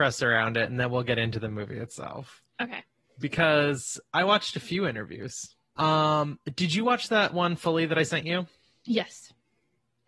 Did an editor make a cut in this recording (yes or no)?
yes